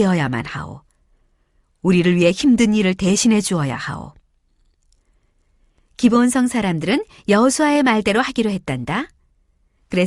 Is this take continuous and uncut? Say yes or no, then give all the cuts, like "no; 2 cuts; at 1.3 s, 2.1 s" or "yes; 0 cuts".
yes; 0 cuts